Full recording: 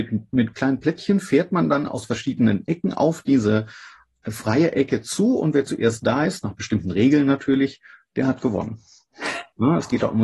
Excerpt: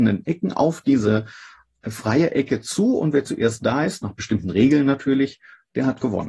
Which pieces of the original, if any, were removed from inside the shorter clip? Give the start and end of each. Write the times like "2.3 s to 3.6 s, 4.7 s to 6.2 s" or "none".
none